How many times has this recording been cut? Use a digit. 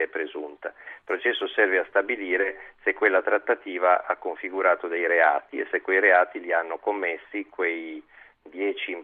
0